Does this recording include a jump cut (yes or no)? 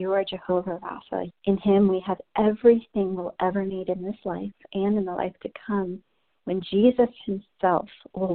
yes